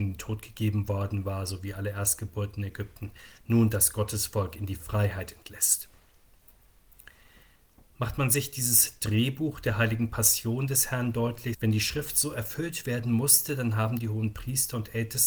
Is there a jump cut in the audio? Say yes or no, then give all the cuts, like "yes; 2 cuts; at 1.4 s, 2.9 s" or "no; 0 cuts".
yes; 1 cut; at 11.5 s